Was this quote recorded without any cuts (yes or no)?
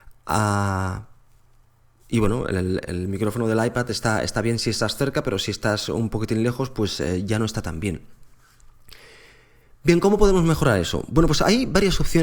yes